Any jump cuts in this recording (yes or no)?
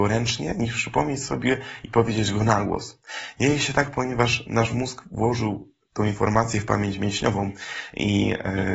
no